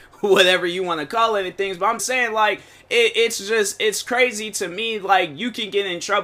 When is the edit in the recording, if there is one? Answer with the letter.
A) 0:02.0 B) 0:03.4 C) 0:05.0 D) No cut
A